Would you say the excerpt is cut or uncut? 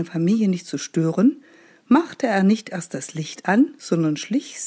uncut